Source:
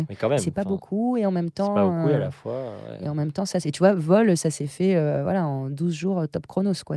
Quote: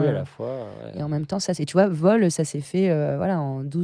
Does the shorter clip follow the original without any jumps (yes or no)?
yes